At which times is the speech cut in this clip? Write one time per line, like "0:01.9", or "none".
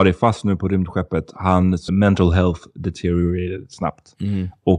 0:01.9